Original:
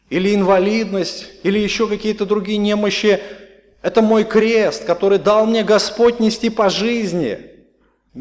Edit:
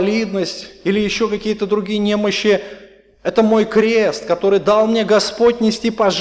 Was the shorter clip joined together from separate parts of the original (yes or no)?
no